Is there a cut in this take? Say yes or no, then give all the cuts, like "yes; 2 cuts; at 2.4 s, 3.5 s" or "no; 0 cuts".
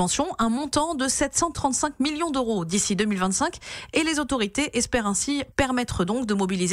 yes; 1 cut; at 5.5 s